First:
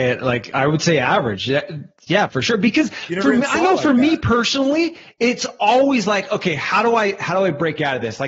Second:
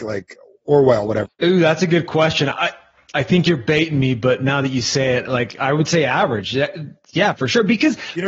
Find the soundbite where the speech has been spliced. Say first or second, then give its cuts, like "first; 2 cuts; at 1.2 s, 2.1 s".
second; 1 cut; at 1.3 s